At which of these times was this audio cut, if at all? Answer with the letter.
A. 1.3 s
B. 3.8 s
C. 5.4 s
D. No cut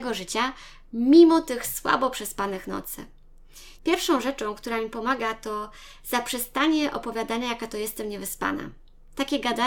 B